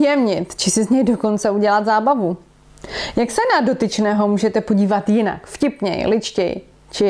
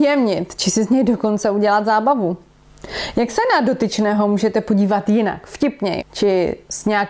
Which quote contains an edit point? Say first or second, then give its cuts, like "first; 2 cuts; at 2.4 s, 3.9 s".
second; 1 cut; at 6.0 s